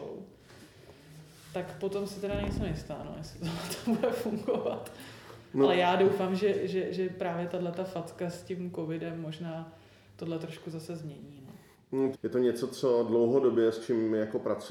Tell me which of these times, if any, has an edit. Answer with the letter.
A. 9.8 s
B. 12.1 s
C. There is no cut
B